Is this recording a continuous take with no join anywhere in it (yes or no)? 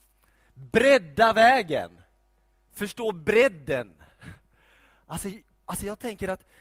yes